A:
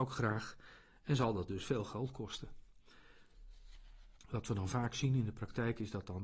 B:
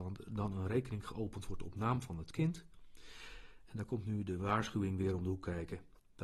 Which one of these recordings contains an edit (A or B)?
A